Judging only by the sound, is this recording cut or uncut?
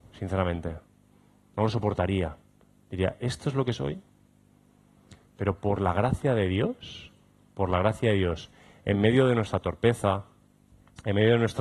uncut